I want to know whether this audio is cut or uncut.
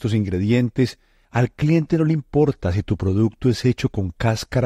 cut